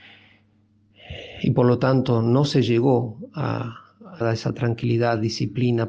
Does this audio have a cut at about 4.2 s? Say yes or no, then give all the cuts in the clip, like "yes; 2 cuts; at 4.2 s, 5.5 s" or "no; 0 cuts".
yes; 1 cut; at 4.2 s